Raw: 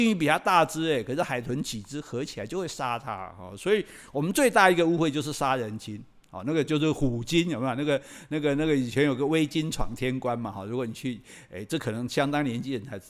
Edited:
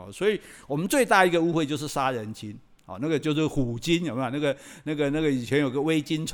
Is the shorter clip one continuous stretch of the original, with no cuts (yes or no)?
yes